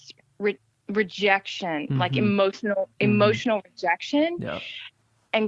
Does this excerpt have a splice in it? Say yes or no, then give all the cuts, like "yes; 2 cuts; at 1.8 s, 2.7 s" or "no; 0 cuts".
no; 0 cuts